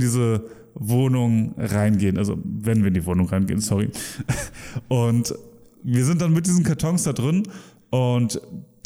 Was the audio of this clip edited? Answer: no; 0 cuts

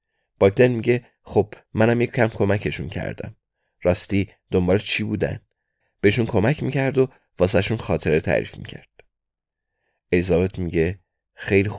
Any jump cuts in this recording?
yes; 1 cut; at 5.8 s

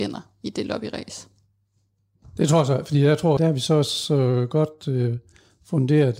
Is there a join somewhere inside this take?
yes; 1 cut; at 3.4 s

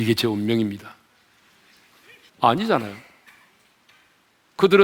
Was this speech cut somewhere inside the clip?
yes; 1 cut; at 2.3 s

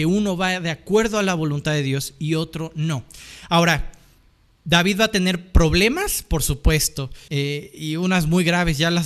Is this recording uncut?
no; 1 cut; at 7.3 s

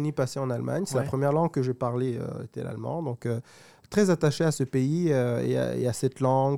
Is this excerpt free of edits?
yes; 0 cuts

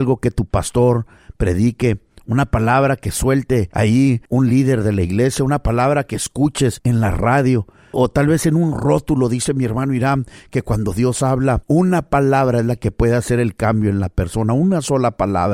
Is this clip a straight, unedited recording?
no; 1 cut; at 7.9 s

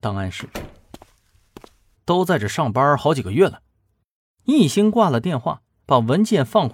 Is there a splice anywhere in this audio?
yes; 2 cuts; at 1.9 s, 4.4 s

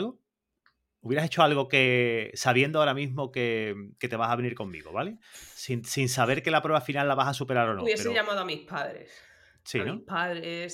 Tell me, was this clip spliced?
no; 0 cuts

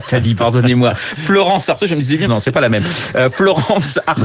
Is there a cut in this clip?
yes; 1 cut; at 2.3 s

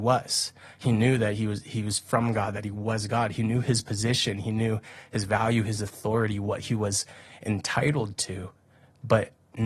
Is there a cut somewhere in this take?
no; 0 cuts

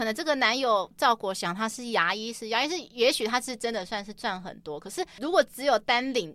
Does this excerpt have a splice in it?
no; 0 cuts

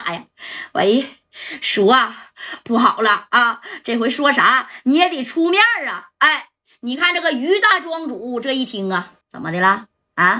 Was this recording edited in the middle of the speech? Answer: yes; 1 cut; at 9.2 s

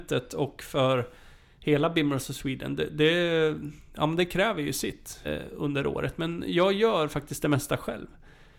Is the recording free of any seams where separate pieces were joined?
no; 1 cut; at 5.2 s

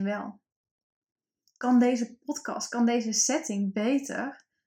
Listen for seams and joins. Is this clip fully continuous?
yes; 0 cuts

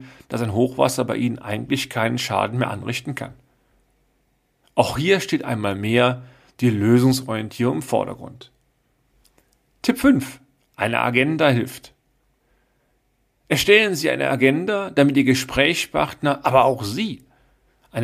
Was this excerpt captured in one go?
yes; 0 cuts

